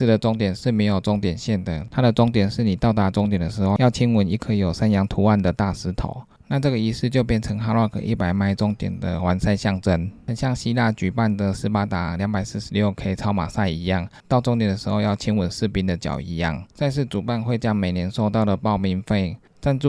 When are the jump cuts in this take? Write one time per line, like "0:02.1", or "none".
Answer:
0:16.7